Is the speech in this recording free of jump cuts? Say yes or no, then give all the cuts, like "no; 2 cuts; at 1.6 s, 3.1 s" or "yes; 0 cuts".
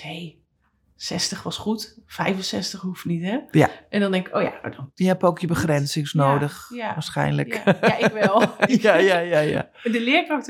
no; 1 cut; at 8.7 s